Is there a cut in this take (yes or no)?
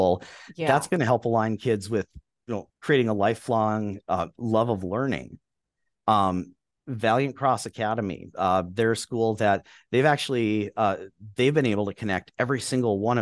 yes